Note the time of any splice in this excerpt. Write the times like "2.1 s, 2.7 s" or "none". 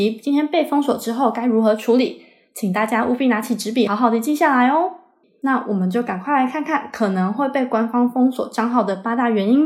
3.9 s, 5.2 s

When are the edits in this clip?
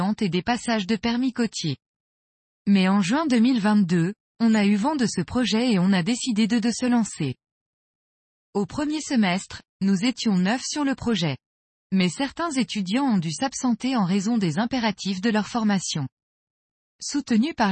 none

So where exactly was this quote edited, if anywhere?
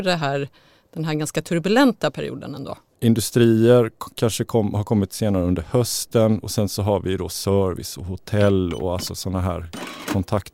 2.9 s

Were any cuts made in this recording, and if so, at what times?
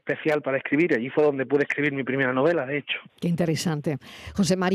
3.1 s

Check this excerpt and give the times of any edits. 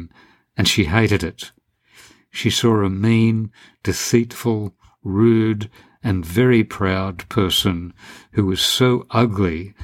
none

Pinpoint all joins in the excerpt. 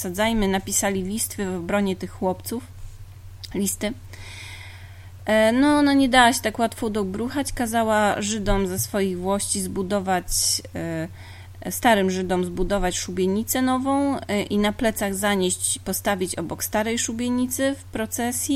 none

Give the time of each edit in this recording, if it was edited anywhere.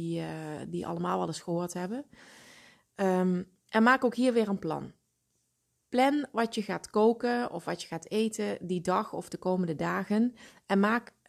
none

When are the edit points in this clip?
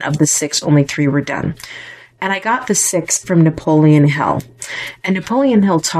3.2 s

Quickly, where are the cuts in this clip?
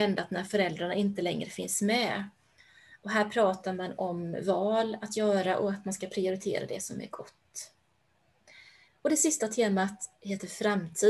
8.9 s

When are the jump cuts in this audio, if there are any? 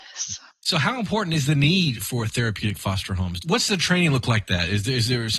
3.4 s

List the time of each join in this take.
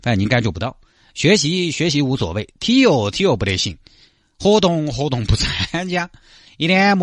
none

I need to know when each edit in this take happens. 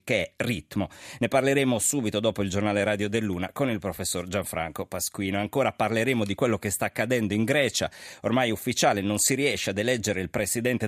none

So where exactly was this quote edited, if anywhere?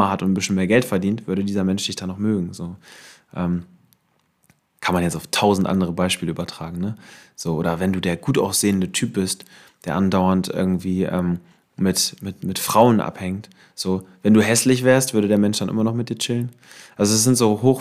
none

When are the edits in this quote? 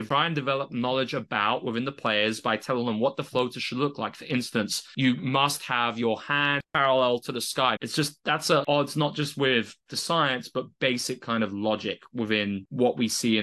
7.8 s

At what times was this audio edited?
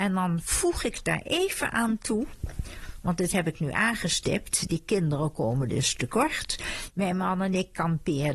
none

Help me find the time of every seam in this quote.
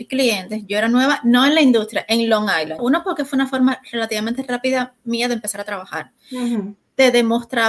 2.8 s

